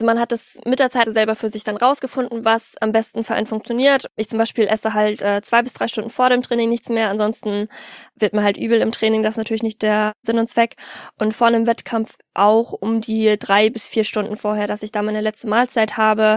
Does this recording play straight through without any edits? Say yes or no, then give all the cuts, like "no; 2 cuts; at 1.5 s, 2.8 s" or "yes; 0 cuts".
no; 1 cut; at 1.0 s